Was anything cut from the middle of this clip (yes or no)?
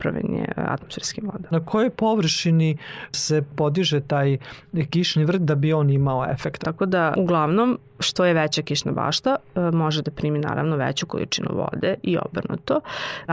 yes